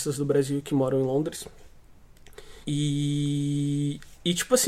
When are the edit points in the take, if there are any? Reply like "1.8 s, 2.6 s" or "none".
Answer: 2.6 s